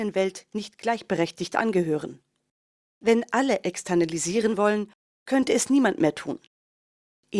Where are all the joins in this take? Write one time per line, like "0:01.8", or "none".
none